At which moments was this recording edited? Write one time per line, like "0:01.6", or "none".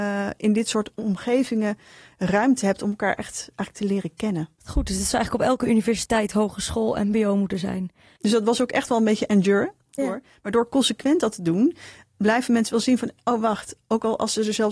0:04.6
0:08.2
0:10.0